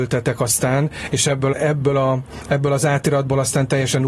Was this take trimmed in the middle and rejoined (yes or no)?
yes